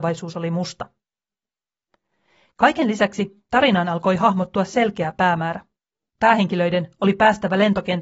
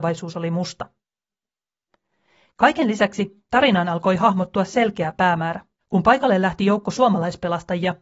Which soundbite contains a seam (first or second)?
second